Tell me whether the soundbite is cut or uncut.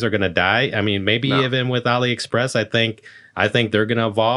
uncut